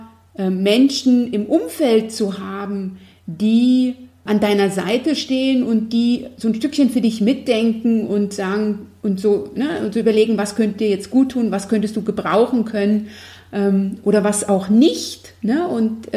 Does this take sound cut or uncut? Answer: cut